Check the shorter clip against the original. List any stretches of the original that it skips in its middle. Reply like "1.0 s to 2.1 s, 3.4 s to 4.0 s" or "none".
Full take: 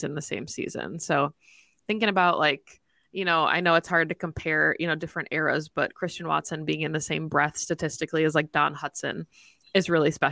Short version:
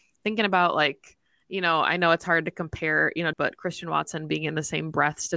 5.0 s to 5.7 s